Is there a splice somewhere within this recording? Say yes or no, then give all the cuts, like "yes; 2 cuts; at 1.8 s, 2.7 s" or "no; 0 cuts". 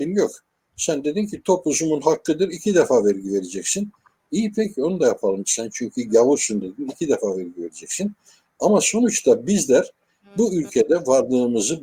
yes; 1 cut; at 8.4 s